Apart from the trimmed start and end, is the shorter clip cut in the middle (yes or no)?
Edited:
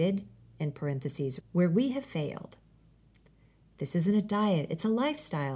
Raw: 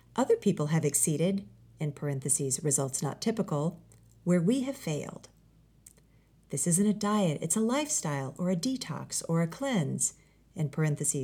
yes